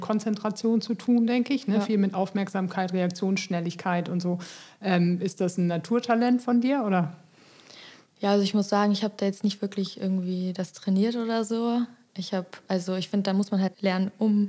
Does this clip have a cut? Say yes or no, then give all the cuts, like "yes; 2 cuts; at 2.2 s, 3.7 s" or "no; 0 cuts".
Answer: no; 0 cuts